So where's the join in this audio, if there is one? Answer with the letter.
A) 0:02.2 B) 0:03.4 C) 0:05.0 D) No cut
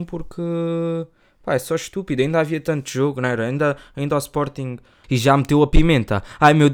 C